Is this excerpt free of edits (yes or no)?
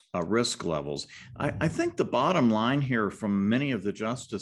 yes